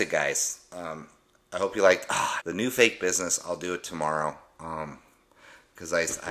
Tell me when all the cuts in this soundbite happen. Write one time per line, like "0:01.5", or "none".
0:02.4